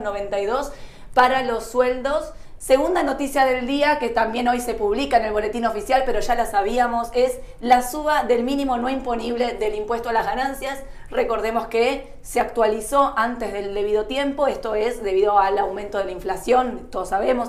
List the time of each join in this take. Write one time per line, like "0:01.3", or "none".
0:02.6